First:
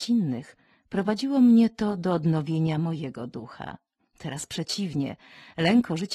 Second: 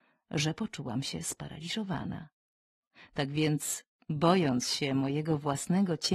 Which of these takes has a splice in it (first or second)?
first